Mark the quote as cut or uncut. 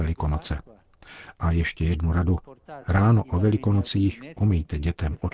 uncut